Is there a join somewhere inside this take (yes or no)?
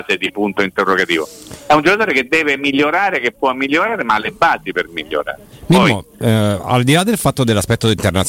no